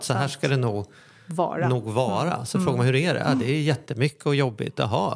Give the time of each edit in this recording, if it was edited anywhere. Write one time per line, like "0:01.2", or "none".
none